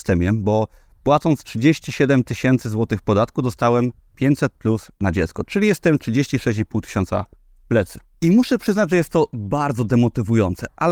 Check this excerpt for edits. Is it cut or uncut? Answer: uncut